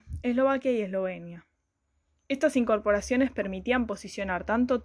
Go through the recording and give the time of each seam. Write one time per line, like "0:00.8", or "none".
none